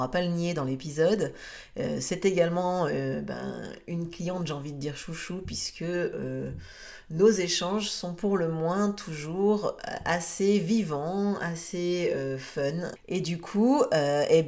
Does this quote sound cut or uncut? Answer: cut